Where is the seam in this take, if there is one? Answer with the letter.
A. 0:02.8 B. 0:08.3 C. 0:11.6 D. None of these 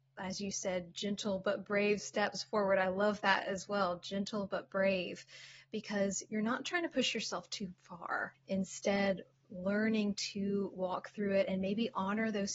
B